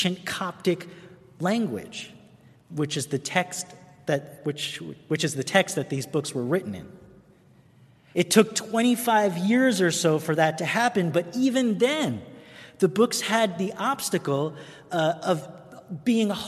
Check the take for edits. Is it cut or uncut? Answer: cut